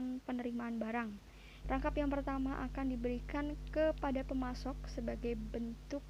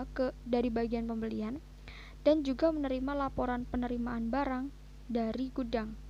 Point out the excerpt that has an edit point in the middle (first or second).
first